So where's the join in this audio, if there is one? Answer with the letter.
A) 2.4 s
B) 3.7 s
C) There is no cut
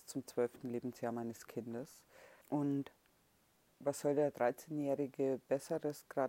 A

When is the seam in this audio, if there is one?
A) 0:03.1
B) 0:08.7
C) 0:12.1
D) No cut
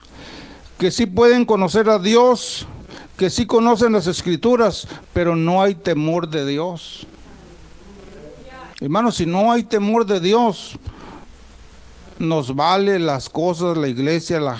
B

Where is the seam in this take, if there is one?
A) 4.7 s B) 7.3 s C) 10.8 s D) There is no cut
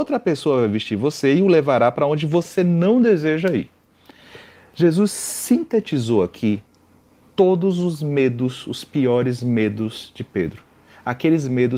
D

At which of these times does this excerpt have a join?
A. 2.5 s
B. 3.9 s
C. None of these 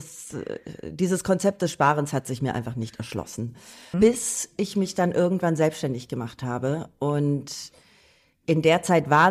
B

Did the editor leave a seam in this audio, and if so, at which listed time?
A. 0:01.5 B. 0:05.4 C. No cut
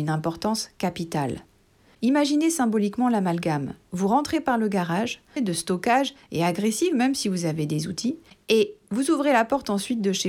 B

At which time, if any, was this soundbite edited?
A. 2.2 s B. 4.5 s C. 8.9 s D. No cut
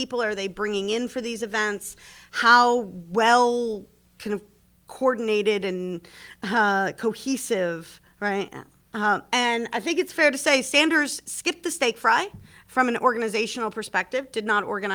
C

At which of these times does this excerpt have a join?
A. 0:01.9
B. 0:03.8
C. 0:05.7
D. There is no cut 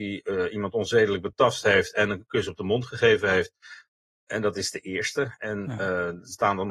D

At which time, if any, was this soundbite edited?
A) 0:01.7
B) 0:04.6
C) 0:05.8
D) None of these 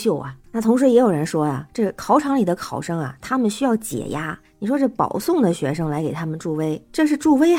D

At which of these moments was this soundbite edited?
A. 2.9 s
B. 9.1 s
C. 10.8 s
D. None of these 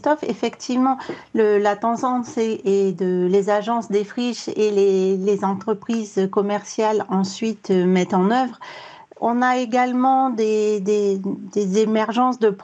B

